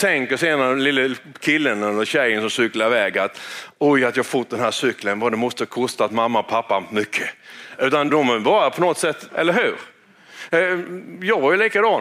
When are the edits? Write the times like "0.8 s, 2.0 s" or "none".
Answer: 8.1 s, 9.3 s